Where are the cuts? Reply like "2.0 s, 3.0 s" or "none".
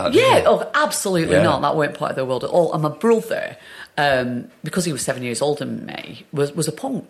none